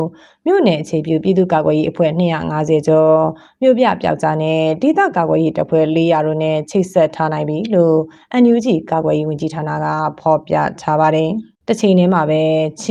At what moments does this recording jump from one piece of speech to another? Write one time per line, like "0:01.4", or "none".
0:11.6